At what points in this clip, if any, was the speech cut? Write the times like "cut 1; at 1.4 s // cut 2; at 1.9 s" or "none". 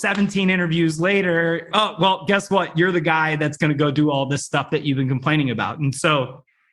cut 1; at 1.7 s